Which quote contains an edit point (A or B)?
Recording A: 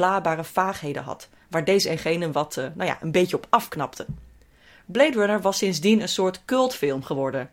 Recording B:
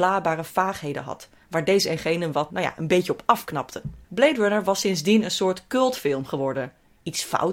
B